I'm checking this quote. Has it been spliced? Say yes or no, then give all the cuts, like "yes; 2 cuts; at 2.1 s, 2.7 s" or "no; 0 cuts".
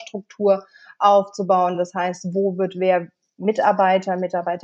no; 0 cuts